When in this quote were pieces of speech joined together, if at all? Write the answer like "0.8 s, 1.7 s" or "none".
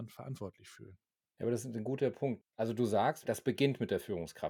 3.2 s